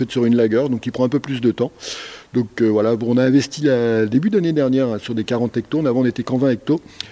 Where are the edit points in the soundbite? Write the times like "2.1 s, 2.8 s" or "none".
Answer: none